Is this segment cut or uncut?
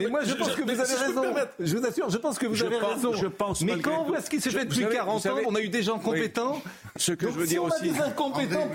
cut